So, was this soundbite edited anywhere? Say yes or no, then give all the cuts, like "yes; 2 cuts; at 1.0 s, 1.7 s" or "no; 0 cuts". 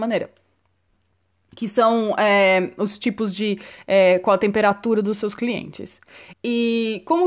yes; 1 cut; at 6.3 s